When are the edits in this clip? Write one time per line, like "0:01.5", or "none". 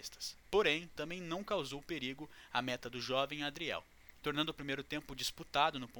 none